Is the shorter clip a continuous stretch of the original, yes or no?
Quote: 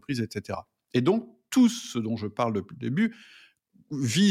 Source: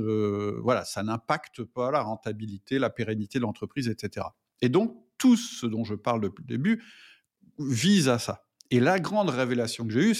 yes